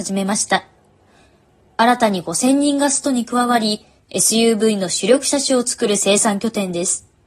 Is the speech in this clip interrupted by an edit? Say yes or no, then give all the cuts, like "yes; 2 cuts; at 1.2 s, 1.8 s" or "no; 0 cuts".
yes; 1 cut; at 4.0 s